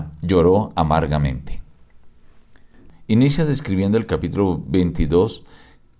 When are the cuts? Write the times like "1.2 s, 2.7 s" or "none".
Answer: none